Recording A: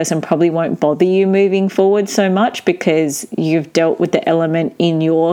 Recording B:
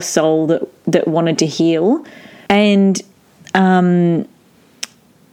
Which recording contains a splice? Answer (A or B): B